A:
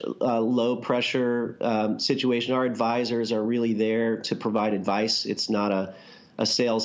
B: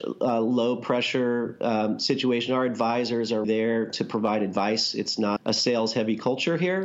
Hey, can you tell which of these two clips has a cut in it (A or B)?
B